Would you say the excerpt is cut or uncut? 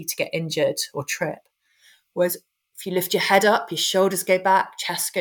uncut